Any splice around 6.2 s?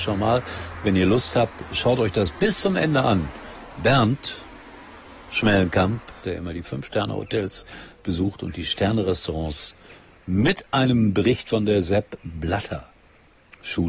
yes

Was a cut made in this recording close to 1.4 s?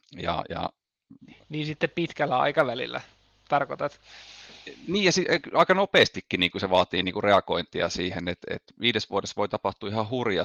no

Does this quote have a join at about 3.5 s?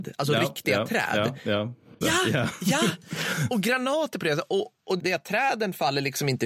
no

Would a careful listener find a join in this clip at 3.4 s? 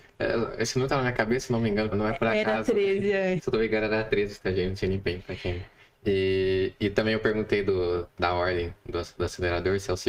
yes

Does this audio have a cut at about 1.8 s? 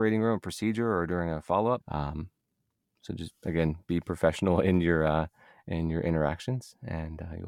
yes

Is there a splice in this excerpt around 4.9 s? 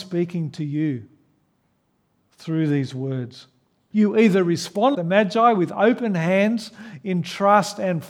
yes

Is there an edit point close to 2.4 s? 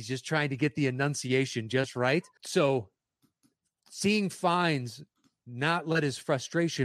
yes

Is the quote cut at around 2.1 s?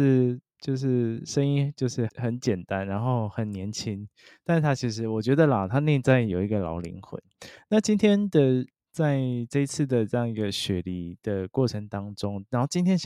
yes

